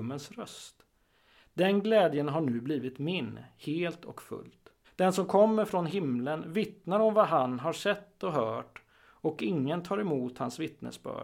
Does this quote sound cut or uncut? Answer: cut